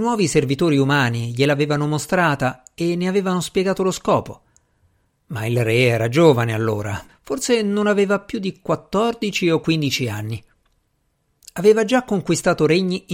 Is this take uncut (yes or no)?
no